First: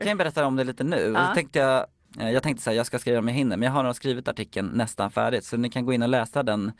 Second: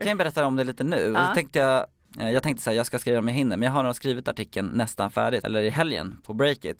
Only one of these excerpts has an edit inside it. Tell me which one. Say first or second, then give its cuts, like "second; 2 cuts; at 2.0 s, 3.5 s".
second; 1 cut; at 5.4 s